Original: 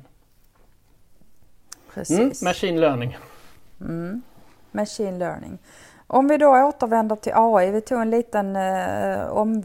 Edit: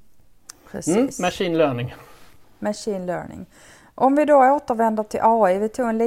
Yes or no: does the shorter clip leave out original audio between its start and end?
yes